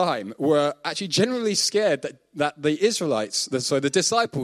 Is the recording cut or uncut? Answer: uncut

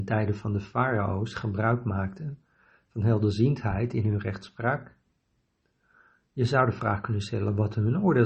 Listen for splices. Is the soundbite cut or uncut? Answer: uncut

